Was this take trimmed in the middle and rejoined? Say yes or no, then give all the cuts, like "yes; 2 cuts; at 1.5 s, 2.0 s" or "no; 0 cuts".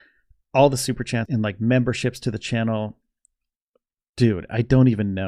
yes; 1 cut; at 1.2 s